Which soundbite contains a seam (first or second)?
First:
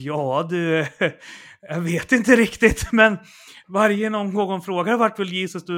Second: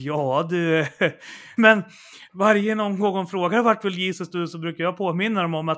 second